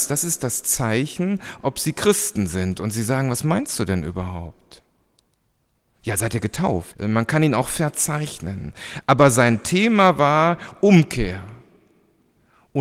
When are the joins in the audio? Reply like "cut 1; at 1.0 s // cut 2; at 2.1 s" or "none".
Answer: cut 1; at 6.9 s